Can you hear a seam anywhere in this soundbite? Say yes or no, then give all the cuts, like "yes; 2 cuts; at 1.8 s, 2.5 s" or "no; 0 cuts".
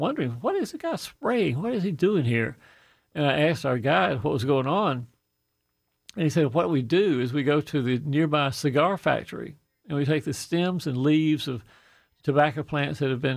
no; 0 cuts